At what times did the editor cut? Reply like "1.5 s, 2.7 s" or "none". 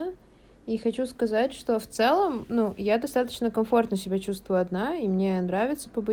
none